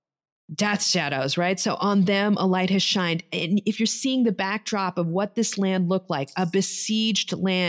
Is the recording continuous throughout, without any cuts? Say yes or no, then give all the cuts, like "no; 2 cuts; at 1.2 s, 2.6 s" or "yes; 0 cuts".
yes; 0 cuts